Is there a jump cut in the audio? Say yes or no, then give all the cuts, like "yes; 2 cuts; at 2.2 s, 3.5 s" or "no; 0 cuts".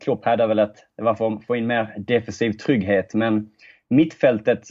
no; 0 cuts